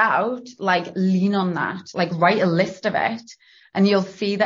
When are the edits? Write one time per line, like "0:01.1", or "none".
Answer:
none